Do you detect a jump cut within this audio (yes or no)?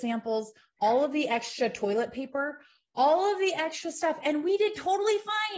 no